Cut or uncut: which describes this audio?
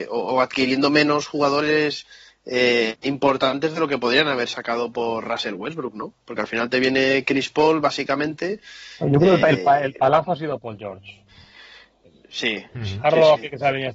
uncut